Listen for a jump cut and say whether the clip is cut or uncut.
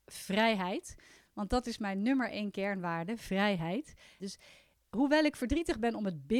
cut